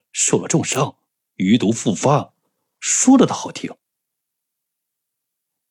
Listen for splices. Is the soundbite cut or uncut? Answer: uncut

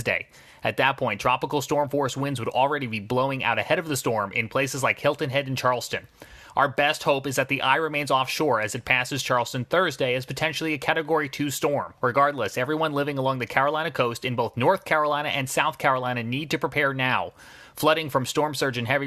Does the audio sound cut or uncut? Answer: cut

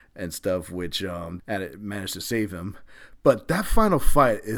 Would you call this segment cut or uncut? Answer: cut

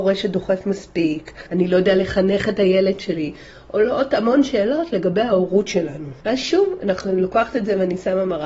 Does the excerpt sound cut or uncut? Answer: cut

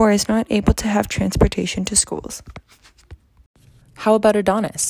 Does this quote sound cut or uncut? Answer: cut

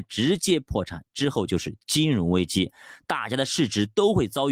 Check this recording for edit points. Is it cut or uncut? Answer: uncut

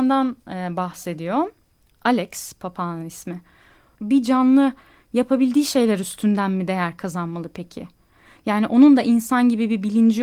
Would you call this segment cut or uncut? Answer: cut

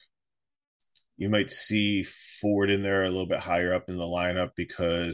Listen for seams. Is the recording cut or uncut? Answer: uncut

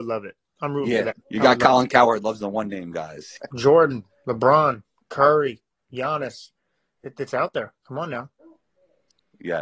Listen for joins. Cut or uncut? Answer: cut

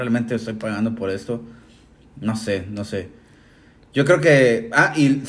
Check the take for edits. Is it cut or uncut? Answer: uncut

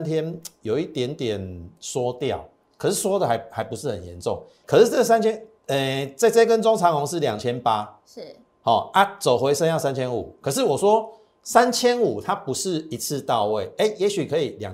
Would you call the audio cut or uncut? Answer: cut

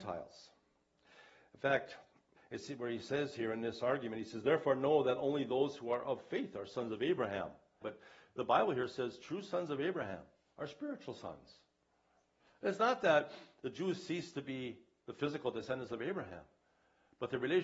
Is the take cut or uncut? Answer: cut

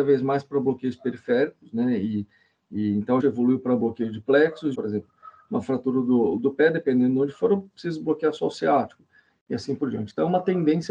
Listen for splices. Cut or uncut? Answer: cut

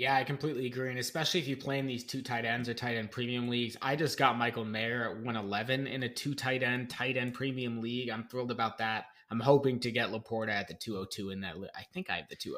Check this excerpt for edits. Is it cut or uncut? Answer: uncut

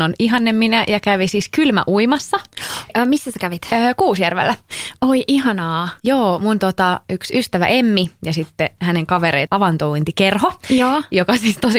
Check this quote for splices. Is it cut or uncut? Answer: cut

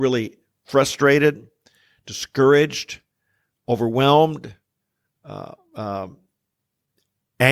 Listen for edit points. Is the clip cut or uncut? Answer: uncut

